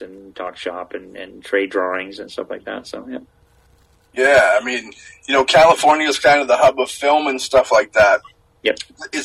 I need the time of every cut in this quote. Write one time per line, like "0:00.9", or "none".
none